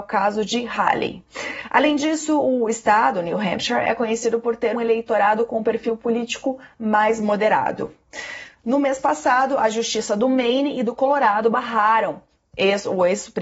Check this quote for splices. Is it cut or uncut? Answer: cut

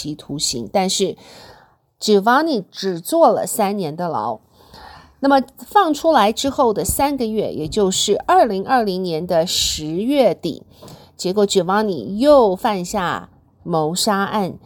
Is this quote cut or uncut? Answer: uncut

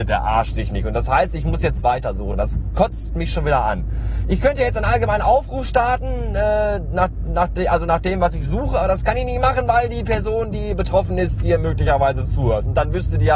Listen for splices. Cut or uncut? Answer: uncut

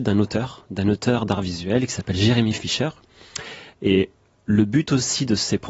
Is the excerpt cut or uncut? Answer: cut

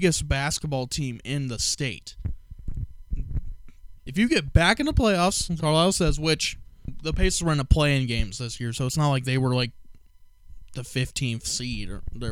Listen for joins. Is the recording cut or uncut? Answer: cut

